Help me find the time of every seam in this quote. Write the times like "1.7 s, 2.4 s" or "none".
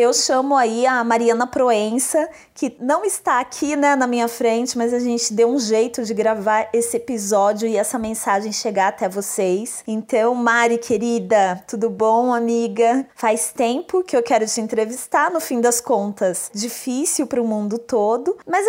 13.1 s, 16.5 s